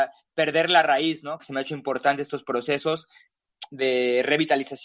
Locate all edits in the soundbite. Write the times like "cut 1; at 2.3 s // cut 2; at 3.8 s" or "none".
cut 1; at 1.4 s